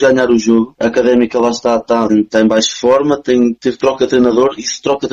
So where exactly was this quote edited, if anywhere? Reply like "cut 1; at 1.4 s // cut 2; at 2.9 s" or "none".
cut 1; at 2.1 s